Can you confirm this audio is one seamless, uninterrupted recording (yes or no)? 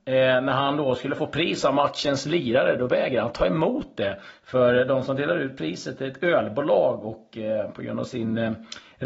yes